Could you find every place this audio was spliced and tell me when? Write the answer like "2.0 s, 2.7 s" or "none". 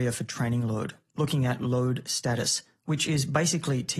none